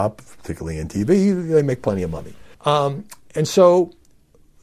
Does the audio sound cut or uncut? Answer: cut